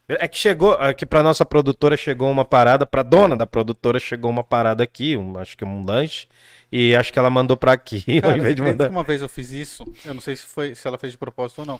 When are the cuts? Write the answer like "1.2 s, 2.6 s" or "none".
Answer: none